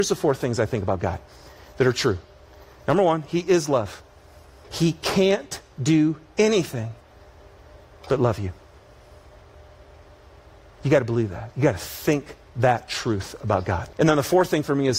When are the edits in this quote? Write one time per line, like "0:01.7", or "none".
0:04.6
0:13.9